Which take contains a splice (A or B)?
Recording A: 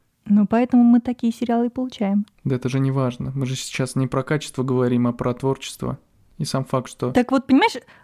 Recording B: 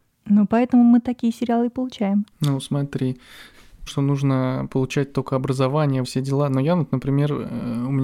B